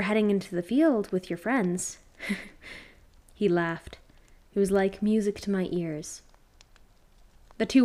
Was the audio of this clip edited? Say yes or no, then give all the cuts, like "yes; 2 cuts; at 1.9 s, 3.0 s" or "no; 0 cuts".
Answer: no; 0 cuts